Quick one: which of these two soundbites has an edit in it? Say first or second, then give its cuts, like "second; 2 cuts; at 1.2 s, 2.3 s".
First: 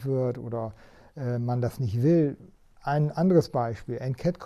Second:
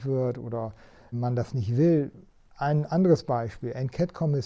second; 1 cut; at 1.1 s